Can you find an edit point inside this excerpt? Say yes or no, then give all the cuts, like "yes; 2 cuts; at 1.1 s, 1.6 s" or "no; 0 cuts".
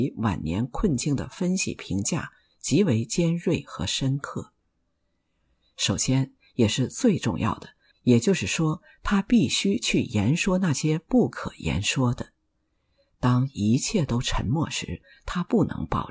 yes; 1 cut; at 7.9 s